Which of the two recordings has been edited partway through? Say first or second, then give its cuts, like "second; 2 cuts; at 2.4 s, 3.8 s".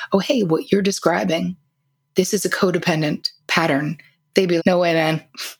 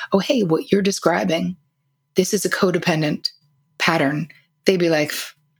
first; 2 cuts; at 3.4 s, 4.6 s